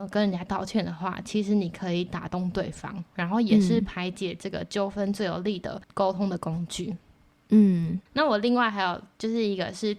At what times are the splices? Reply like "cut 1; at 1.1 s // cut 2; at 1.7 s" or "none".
none